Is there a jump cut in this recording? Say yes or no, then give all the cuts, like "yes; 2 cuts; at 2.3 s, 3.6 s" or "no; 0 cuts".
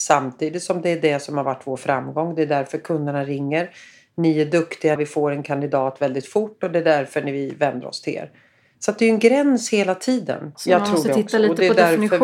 yes; 2 cuts; at 5.0 s, 10.5 s